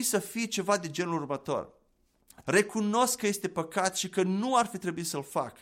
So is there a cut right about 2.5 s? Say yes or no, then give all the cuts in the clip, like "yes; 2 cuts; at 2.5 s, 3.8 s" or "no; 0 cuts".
yes; 1 cut; at 2.5 s